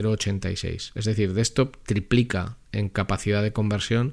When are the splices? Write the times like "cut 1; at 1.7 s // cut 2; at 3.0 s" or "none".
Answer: none

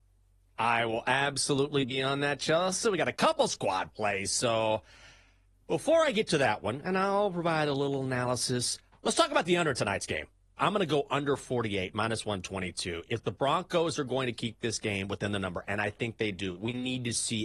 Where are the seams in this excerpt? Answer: cut 1; at 10.6 s

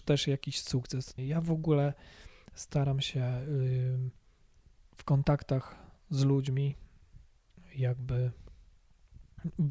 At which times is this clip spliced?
cut 1; at 1.2 s

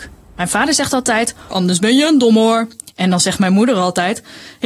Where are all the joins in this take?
cut 1; at 1.5 s

